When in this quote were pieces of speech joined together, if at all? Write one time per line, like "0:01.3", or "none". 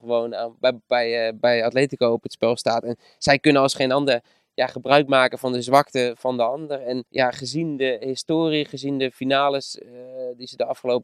0:07.1